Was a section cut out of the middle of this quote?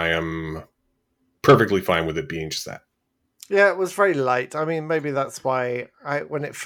no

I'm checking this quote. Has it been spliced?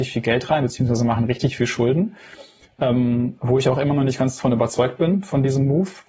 no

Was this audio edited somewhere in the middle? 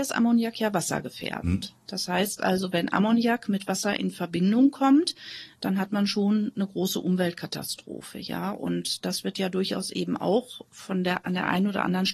no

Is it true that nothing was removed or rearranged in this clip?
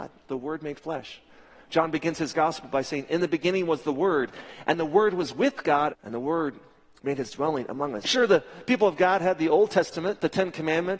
no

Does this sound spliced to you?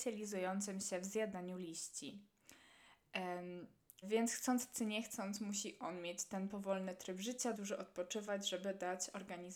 yes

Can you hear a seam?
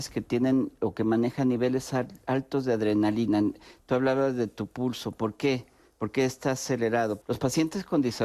yes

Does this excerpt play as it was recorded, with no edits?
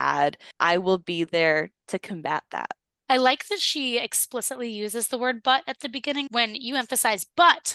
no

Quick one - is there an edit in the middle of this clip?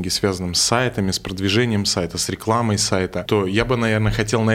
yes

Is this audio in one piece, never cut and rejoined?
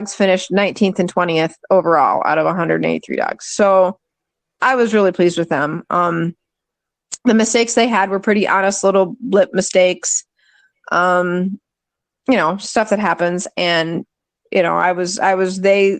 yes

